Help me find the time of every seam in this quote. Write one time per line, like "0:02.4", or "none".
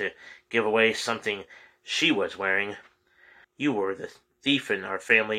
0:03.4